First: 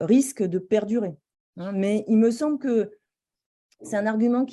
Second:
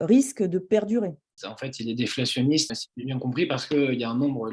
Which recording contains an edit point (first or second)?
second